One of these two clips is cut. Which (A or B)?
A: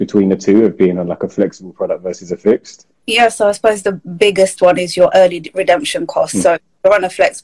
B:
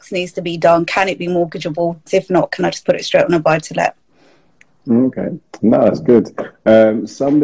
B